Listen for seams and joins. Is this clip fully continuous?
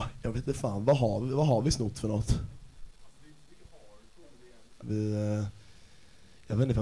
no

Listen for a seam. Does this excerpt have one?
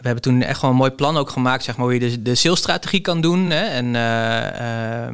no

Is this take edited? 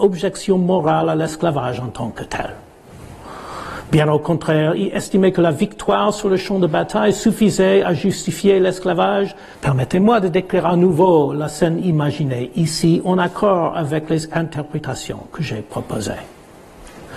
yes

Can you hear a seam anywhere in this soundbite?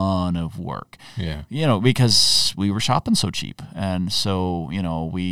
no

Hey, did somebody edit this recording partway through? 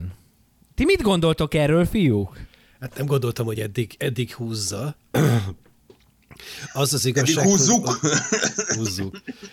no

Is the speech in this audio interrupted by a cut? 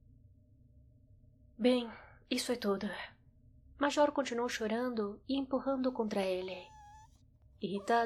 yes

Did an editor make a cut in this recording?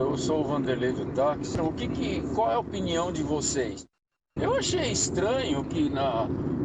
yes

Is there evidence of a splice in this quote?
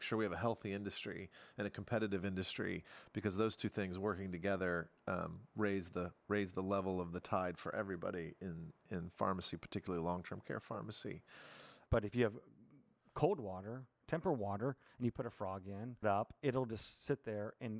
yes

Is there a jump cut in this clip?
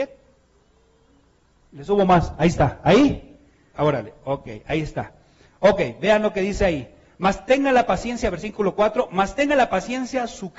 yes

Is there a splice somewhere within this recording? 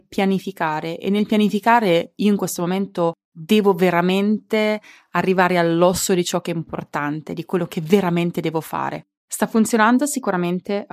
yes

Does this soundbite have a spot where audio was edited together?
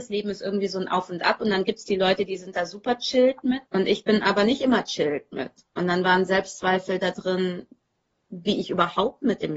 yes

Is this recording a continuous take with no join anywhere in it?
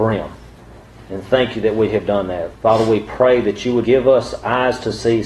no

